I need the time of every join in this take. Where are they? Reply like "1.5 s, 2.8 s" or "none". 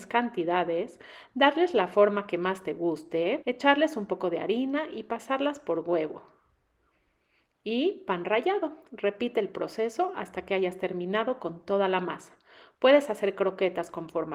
3.4 s